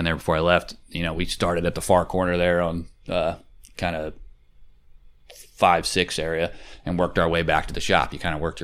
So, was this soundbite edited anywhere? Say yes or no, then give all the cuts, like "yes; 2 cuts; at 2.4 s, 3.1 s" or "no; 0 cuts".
no; 0 cuts